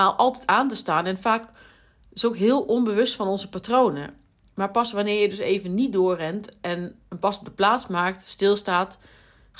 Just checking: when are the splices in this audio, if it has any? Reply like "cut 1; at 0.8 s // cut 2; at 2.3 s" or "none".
none